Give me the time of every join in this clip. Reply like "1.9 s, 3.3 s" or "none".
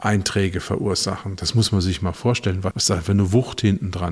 2.7 s